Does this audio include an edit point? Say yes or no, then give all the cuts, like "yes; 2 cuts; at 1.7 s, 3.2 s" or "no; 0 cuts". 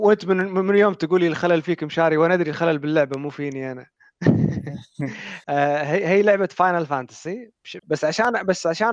yes; 2 cuts; at 5.4 s, 7.8 s